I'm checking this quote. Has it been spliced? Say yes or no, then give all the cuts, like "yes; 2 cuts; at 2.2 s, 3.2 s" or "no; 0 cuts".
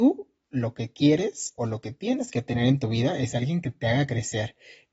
no; 0 cuts